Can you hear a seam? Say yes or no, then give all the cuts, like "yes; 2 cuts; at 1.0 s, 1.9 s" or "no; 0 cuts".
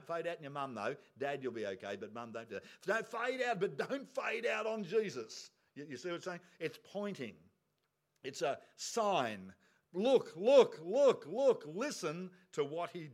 no; 0 cuts